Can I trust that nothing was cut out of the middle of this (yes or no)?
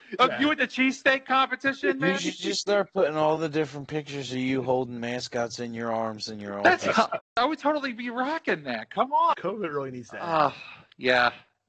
no